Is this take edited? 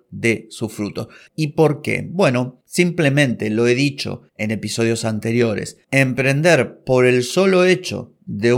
yes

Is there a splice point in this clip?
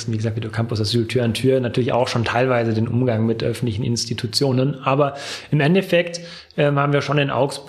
no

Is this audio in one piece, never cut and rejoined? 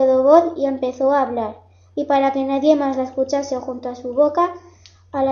yes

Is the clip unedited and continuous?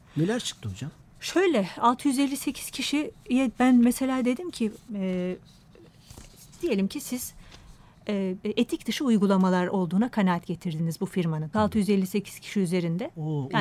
no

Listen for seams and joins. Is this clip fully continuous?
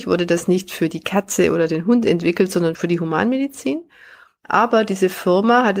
no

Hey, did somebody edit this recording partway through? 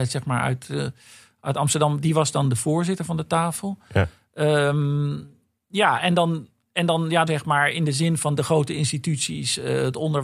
yes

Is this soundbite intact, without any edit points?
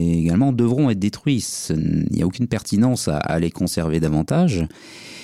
yes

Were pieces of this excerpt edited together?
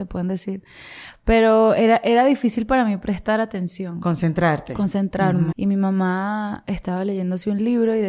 yes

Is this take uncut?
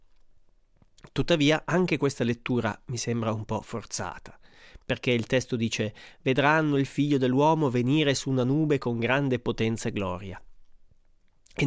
yes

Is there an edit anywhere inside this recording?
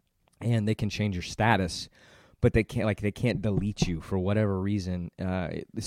no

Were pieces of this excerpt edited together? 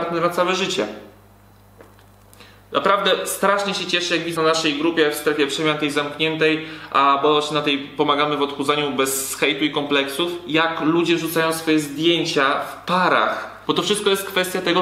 yes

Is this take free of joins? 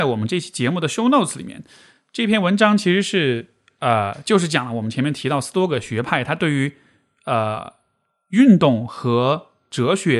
yes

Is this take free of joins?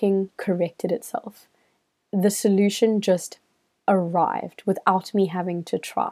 yes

